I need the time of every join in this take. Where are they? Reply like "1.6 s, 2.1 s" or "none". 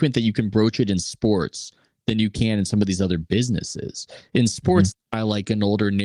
4.9 s